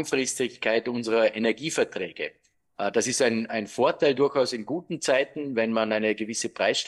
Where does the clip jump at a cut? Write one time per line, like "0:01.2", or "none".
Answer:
none